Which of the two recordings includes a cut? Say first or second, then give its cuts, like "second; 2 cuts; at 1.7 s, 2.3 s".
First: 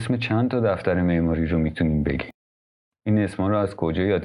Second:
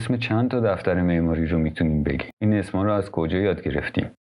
second; 1 cut; at 2.3 s